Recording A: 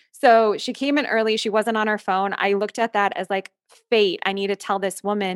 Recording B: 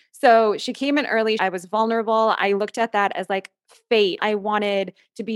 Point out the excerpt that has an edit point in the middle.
B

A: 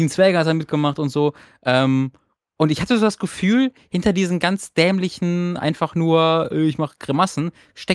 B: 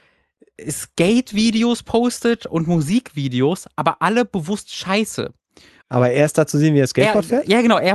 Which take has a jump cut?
B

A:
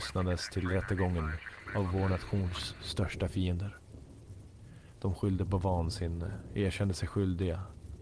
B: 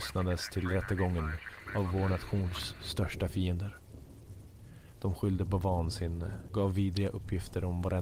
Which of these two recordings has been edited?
B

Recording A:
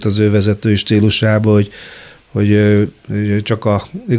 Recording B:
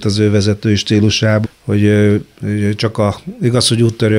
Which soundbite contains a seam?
B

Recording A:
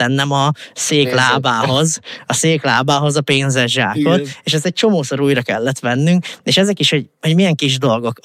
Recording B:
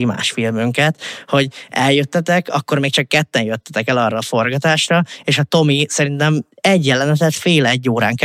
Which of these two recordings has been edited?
B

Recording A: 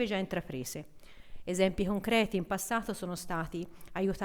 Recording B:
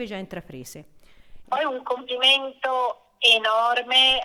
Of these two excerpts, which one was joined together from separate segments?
B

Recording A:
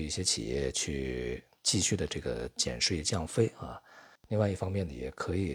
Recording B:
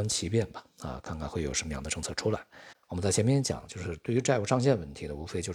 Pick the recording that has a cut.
B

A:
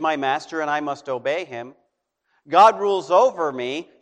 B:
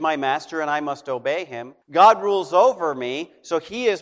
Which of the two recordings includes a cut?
B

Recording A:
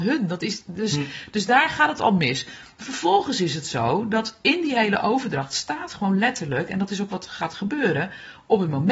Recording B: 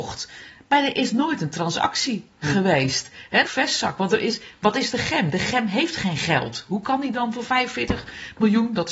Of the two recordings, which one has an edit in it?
B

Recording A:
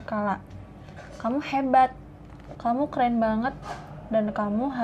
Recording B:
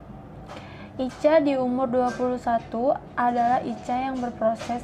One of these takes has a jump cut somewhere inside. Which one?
A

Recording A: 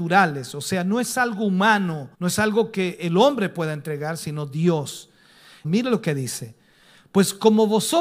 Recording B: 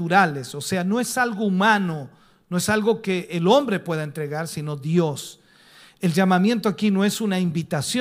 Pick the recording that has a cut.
A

